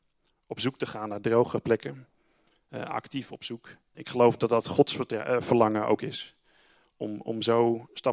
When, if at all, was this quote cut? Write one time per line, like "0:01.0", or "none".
0:03.9